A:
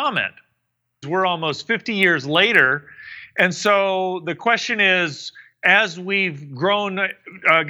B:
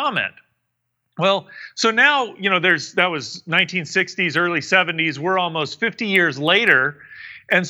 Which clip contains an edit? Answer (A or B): A